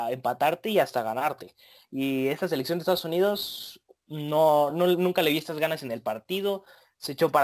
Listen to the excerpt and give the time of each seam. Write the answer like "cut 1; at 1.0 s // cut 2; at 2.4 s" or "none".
none